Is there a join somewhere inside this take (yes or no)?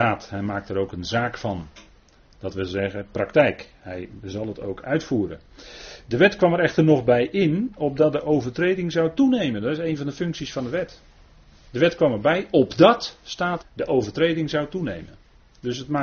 yes